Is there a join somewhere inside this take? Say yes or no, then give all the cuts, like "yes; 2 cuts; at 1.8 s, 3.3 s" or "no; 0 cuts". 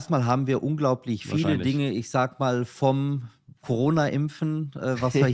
no; 0 cuts